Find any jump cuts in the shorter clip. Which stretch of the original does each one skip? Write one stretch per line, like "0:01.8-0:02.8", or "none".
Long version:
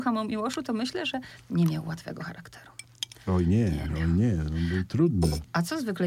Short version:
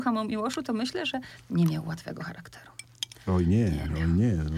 none